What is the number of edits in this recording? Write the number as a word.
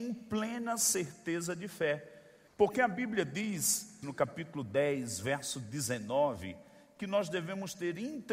two